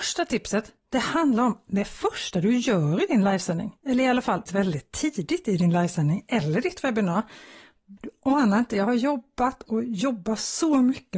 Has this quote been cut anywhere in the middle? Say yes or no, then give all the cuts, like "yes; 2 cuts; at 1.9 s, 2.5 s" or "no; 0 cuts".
yes; 2 cuts; at 4.5 s, 8.0 s